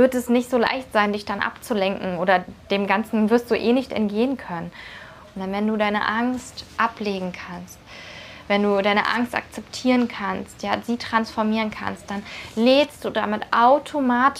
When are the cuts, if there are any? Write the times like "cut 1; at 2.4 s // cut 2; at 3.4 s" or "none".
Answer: cut 1; at 5.4 s